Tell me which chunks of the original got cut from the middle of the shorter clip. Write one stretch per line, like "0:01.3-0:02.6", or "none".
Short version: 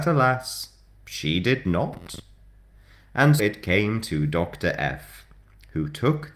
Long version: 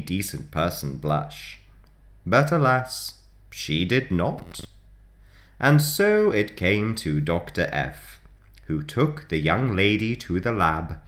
0:05.8-0:06.3